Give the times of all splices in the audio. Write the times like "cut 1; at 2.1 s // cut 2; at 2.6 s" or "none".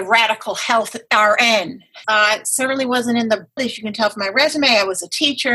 cut 1; at 2.0 s // cut 2; at 3.6 s